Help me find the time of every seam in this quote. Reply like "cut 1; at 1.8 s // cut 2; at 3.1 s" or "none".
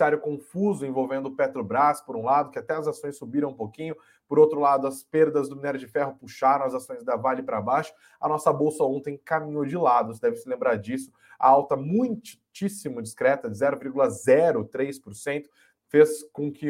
none

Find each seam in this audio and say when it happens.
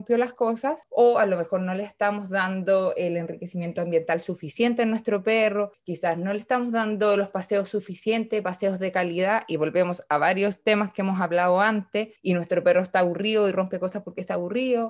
none

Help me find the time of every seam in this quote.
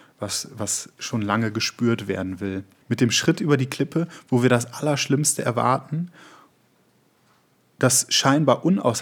cut 1; at 2.8 s

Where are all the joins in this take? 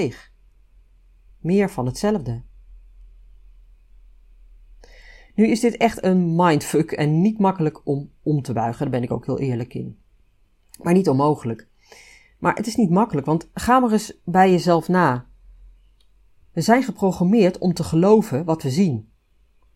none

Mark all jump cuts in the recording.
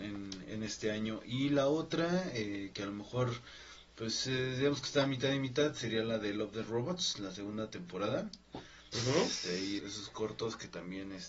cut 1; at 8.5 s // cut 2; at 9.8 s

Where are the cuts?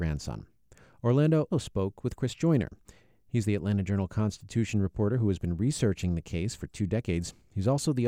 cut 1; at 1.5 s

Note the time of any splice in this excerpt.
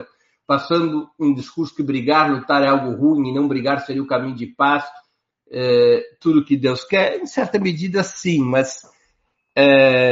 none

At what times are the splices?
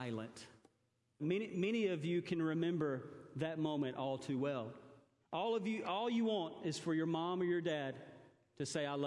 cut 1; at 1.2 s // cut 2; at 5.2 s

